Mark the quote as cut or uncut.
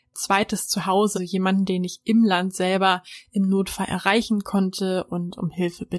cut